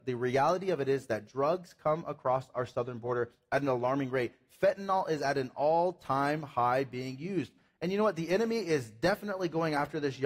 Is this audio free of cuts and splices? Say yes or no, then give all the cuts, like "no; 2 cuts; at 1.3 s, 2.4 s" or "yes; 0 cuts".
yes; 0 cuts